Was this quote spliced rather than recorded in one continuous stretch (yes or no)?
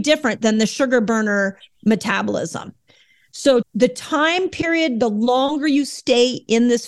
yes